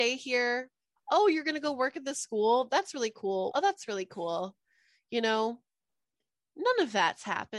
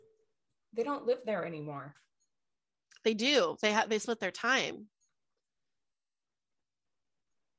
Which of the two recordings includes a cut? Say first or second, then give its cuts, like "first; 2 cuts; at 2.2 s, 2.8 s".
first; 1 cut; at 3.5 s